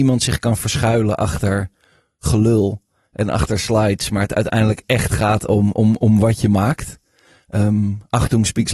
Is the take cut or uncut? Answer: uncut